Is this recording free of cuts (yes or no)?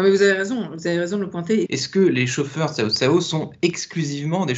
no